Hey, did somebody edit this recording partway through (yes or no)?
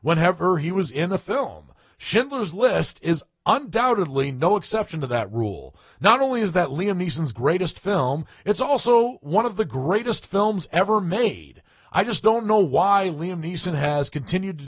no